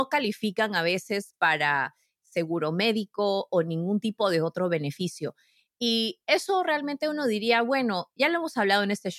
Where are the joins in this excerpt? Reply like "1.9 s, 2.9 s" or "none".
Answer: none

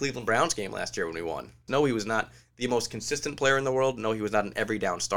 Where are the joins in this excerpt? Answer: 1.7 s

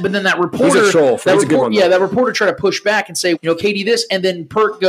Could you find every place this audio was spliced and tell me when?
3.4 s

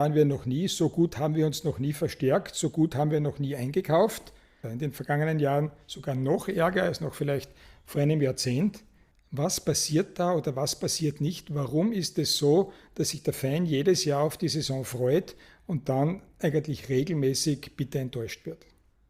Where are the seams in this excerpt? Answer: 4.6 s

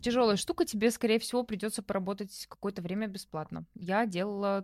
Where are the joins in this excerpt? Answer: none

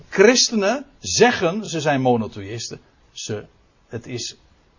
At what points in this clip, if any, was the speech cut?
none

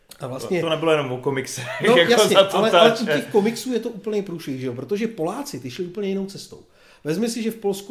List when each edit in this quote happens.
none

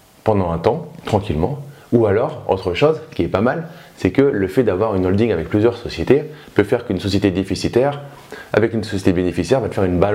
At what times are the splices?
none

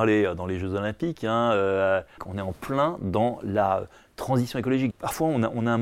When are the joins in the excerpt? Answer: 2.2 s, 4.9 s

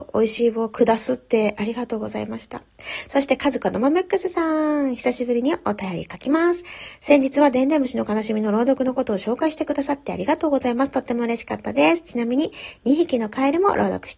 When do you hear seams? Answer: none

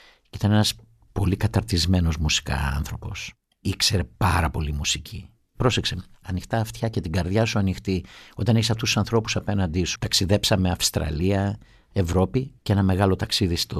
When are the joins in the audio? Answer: 6.2 s, 10.0 s

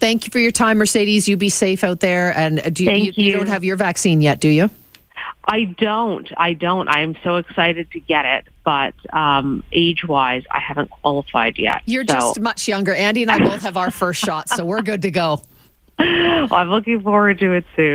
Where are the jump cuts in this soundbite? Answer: none

